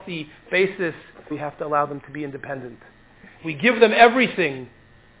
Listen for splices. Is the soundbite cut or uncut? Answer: cut